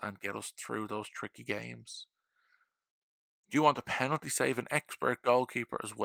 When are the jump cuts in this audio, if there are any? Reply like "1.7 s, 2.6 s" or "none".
3.4 s

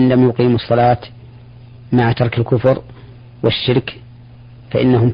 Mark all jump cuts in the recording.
none

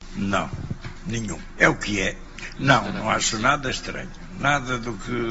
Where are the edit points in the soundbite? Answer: none

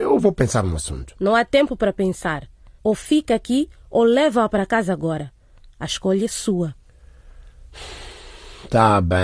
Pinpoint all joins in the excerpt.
2.8 s

